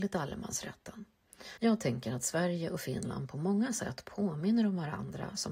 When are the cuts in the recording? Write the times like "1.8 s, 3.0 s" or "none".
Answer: 1.6 s